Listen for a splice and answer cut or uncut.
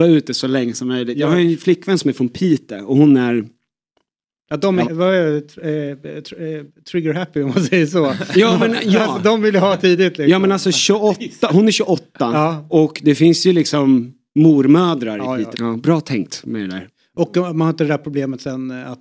cut